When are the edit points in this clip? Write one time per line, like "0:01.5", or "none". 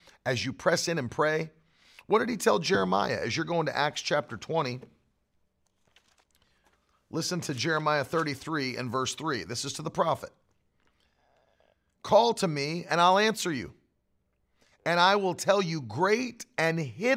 none